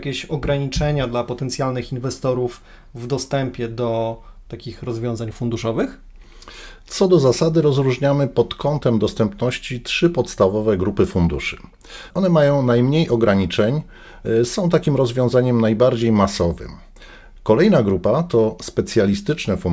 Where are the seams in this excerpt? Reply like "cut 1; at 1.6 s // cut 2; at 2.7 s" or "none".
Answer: cut 1; at 12.1 s